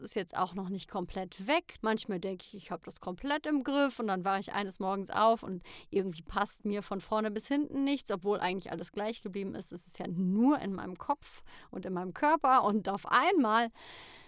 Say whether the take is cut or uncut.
cut